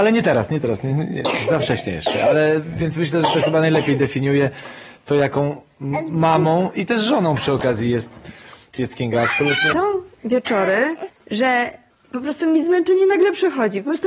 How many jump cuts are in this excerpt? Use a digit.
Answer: 2